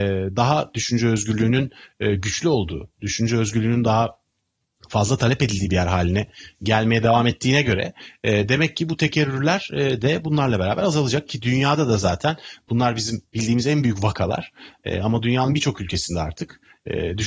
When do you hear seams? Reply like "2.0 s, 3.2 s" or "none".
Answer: none